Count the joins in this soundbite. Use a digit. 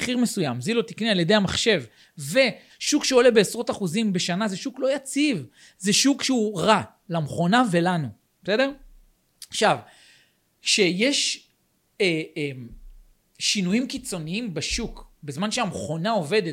1